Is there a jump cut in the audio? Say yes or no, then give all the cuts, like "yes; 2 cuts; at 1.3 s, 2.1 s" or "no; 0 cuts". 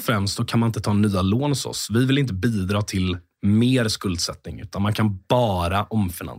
no; 0 cuts